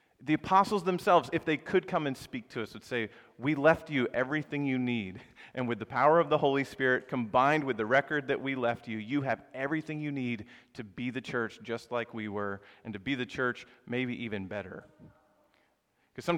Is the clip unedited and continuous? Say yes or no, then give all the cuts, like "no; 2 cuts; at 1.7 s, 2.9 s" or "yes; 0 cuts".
yes; 0 cuts